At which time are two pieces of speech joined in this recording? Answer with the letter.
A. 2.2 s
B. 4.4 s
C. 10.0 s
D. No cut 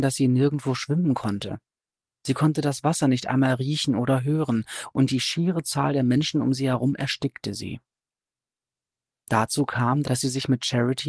C